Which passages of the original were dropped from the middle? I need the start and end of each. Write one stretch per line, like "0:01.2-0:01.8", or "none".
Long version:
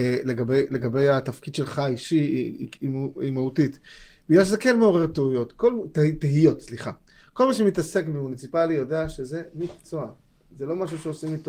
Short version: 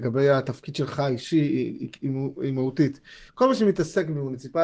0:04.1-0:07.3